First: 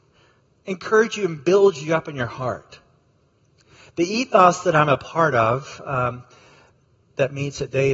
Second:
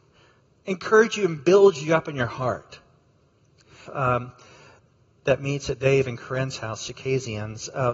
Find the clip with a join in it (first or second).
second